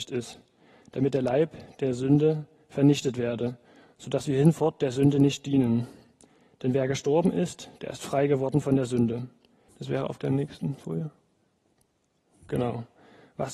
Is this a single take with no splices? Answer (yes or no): no